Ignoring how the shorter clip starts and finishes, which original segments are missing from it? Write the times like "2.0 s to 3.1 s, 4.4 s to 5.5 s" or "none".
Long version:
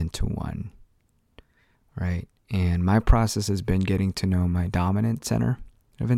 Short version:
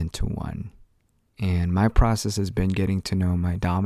1.3 s to 2.4 s